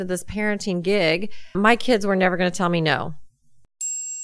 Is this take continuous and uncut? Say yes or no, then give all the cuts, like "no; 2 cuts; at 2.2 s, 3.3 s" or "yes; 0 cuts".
no; 1 cut; at 1.5 s